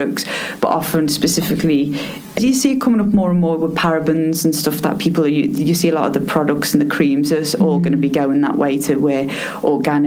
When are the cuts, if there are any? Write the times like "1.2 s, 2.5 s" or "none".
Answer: 2.4 s